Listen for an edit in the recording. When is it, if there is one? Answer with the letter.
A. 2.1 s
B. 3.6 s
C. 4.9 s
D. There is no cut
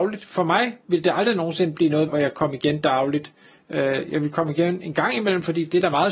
A